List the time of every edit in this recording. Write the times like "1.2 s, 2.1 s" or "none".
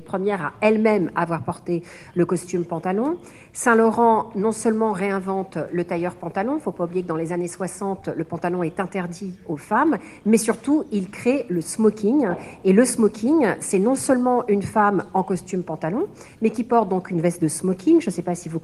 none